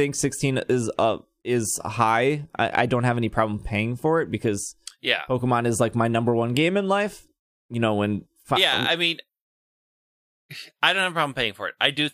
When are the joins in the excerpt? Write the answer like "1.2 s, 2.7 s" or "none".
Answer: none